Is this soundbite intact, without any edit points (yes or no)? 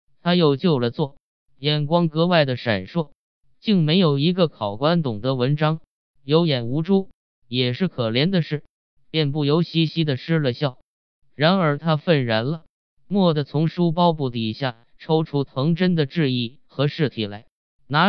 no